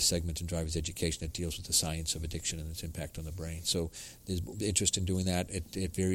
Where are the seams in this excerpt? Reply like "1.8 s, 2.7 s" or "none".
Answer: 3.6 s